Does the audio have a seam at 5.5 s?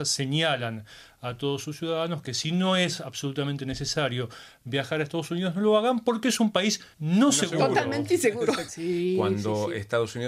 no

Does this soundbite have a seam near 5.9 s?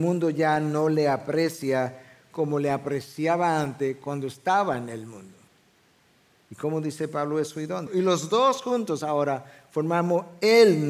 no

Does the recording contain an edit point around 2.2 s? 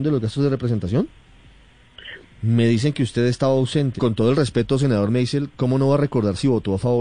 yes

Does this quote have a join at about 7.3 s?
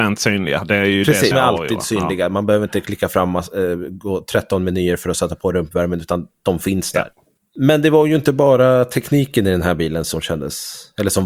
no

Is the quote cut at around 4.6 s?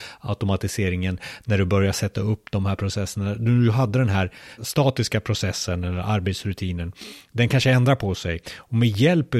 yes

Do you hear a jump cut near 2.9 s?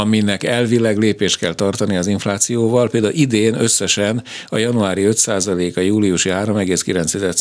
no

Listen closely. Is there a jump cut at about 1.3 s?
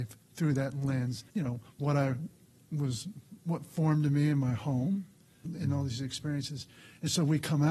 yes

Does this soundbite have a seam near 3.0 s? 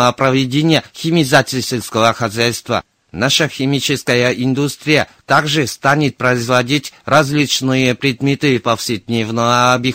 no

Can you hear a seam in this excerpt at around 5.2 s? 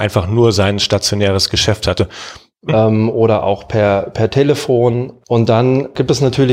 no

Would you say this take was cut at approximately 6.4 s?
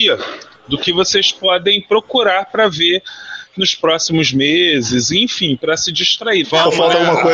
yes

